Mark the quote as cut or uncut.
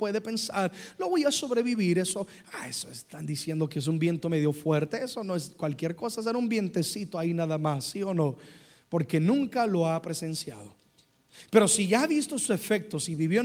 uncut